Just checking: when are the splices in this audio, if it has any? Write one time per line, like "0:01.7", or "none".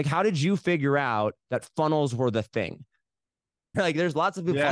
0:03.7